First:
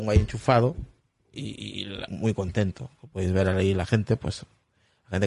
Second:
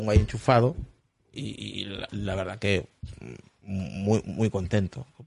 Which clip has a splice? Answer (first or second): first